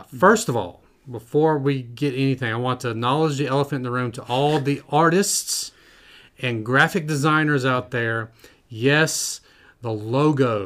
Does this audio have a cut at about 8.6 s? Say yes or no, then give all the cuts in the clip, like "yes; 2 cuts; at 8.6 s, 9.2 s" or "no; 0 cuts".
no; 0 cuts